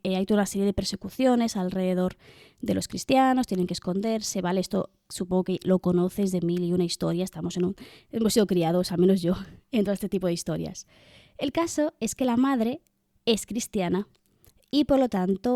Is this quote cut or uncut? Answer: uncut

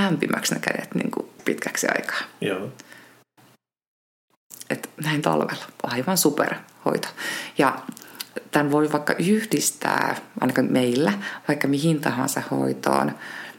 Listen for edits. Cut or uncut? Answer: cut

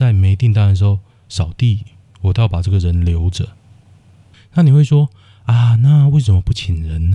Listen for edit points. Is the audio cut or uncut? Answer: cut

